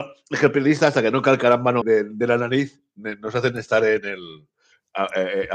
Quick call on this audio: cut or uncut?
cut